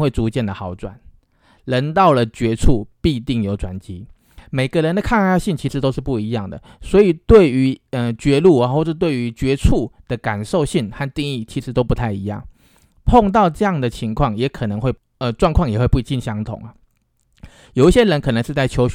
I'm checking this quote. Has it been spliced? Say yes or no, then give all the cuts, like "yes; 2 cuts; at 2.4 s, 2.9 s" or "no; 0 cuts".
no; 0 cuts